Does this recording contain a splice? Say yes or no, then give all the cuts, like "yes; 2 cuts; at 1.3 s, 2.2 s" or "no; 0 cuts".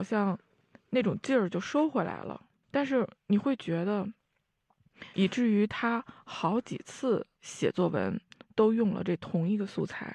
yes; 2 cuts; at 2.6 s, 5.1 s